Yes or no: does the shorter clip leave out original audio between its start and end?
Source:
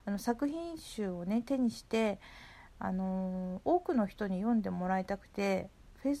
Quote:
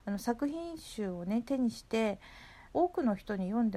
yes